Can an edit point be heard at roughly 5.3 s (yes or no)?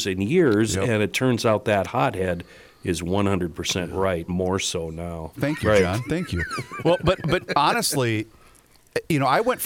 yes